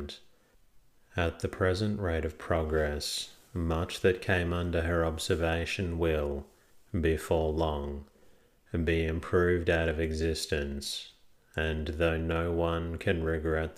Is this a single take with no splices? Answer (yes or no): yes